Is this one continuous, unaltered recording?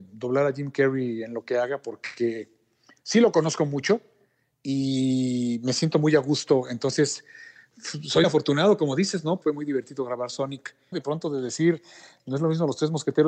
no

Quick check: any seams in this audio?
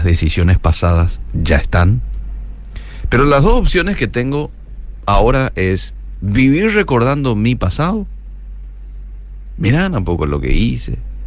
yes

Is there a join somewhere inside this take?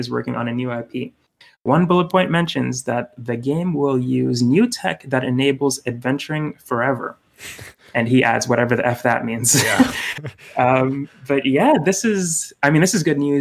no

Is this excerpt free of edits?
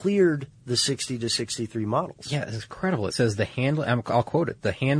yes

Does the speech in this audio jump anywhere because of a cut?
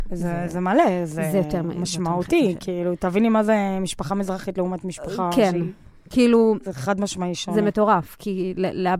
no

